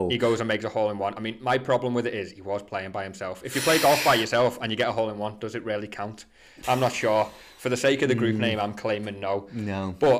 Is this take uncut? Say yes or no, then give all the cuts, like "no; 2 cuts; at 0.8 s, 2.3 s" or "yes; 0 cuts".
yes; 0 cuts